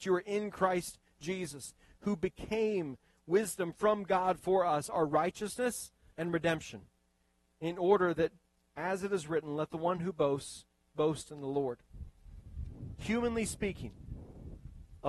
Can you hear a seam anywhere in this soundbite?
yes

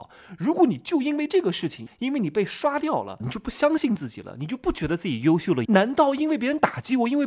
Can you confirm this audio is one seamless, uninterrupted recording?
no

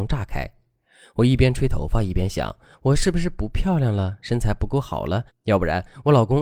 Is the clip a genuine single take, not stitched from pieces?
no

